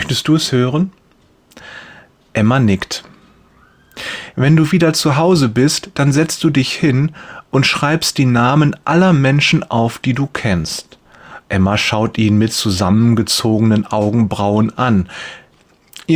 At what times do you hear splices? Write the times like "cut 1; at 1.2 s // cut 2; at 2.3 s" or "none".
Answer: cut 1; at 4.3 s // cut 2; at 11.4 s